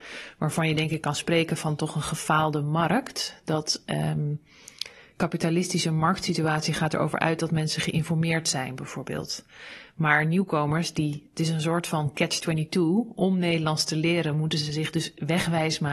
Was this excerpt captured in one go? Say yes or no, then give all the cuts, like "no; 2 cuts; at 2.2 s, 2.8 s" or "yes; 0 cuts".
no; 1 cut; at 5.1 s